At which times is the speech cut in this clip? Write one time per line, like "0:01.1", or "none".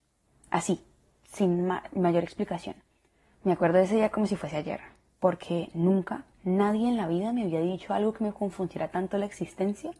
0:03.3
0:06.3